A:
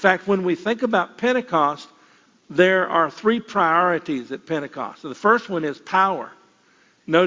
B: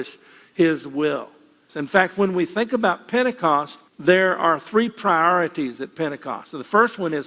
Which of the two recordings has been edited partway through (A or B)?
B